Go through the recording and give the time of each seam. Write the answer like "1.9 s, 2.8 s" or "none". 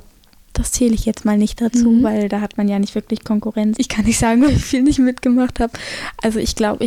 3.8 s